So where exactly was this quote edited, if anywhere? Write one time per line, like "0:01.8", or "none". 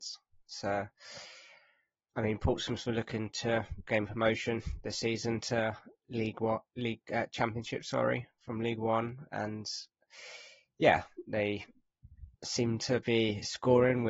0:12.3